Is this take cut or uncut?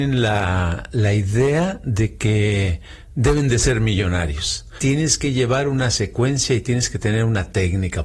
cut